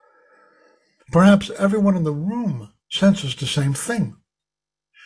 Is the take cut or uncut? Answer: cut